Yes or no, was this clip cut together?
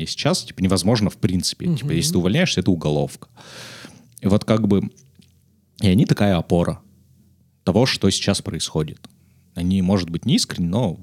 no